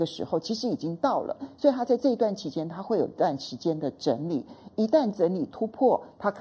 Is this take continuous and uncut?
yes; 0 cuts

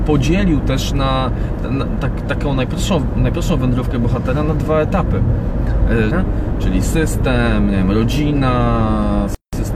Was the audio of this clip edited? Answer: yes; 1 cut; at 6.1 s

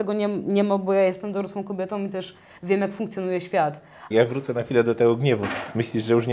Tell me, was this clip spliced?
yes; 1 cut; at 4.1 s

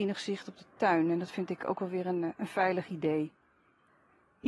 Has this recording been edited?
no; 0 cuts

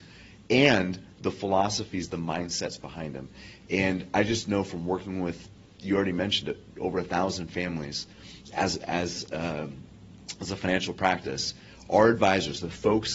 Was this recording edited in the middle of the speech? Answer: no; 0 cuts

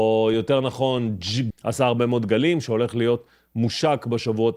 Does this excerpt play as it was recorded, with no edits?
no; 1 cut; at 1.5 s

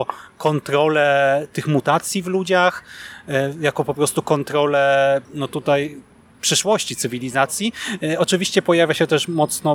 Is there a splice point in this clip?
yes; 1 cut; at 5.2 s

